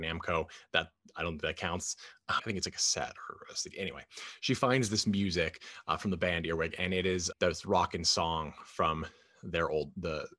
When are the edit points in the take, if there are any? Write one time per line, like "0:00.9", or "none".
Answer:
0:02.4
0:07.3